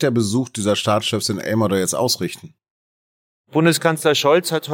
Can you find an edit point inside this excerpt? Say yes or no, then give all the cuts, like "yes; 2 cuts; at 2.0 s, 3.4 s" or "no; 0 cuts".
no; 0 cuts